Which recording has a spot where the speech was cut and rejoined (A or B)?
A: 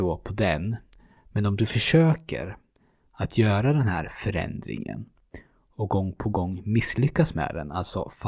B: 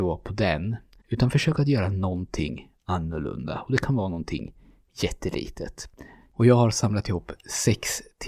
B